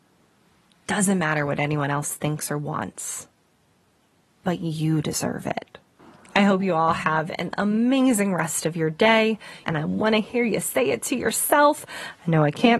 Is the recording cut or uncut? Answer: cut